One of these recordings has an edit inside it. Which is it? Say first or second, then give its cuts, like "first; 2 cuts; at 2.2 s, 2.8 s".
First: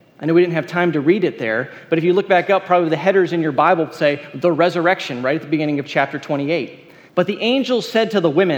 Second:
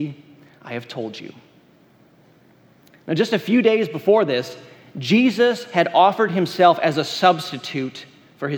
first; 1 cut; at 7.1 s